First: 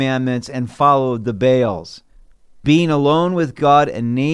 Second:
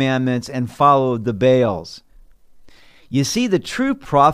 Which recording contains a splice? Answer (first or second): first